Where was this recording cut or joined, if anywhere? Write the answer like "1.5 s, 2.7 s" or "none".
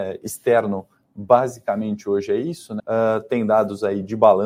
2.8 s